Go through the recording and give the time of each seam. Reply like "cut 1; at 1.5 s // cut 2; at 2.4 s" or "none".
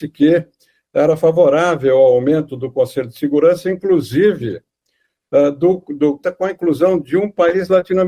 cut 1; at 6.2 s